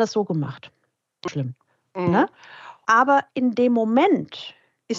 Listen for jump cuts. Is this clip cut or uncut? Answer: cut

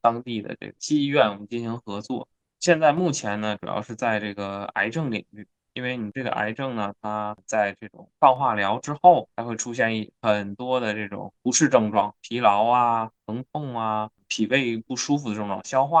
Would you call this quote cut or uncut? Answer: uncut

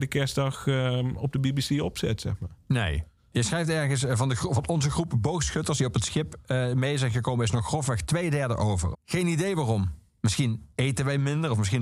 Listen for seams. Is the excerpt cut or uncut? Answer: cut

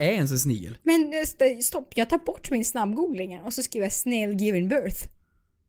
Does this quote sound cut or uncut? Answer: uncut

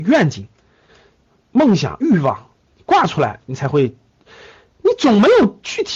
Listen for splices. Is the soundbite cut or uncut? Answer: uncut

